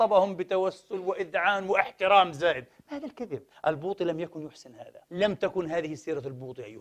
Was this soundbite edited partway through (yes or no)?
yes